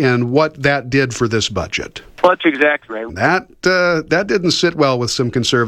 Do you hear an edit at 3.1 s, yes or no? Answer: yes